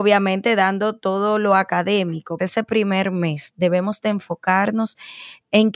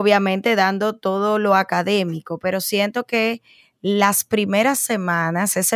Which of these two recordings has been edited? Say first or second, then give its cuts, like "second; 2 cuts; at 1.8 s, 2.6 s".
first; 1 cut; at 2.4 s